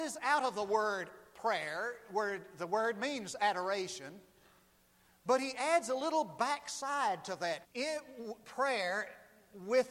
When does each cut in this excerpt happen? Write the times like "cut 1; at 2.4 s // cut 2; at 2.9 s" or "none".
cut 1; at 7.6 s